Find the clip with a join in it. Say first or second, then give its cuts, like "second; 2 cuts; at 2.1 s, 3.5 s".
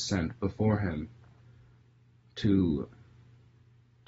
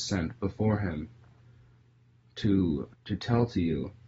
second; 1 cut; at 2.9 s